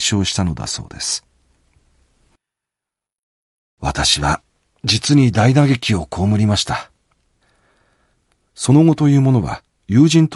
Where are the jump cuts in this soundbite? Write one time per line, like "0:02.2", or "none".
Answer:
none